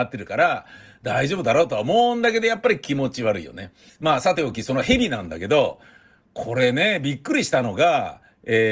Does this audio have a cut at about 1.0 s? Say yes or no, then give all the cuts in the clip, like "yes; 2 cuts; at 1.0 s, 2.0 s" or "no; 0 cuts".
no; 1 cut; at 3.9 s